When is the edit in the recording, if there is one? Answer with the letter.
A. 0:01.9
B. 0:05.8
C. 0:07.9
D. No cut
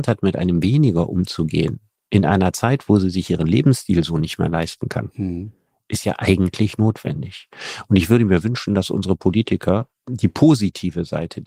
D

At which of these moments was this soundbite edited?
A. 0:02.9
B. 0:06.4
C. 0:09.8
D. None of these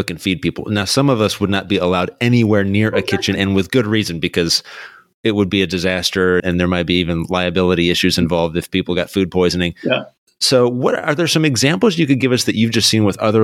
B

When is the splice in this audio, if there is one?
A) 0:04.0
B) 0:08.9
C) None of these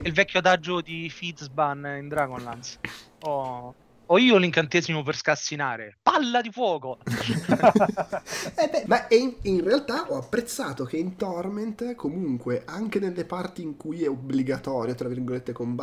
B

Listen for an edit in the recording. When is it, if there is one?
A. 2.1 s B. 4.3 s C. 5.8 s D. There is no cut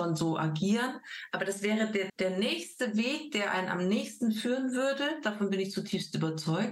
A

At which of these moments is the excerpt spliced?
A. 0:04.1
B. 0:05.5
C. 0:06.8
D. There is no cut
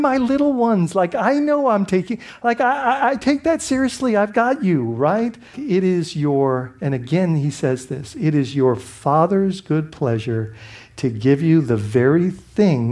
B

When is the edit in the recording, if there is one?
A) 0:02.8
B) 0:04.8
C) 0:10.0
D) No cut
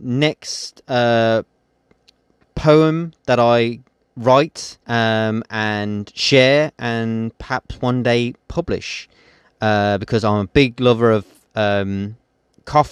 B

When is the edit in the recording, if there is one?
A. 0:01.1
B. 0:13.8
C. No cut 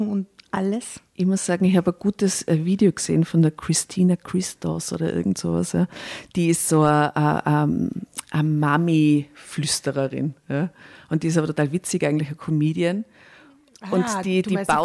A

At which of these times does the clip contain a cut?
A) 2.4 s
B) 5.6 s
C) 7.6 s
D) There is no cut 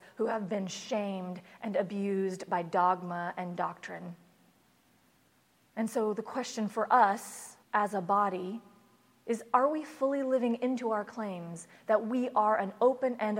C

